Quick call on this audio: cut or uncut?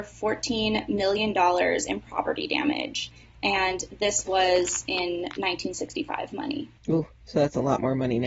cut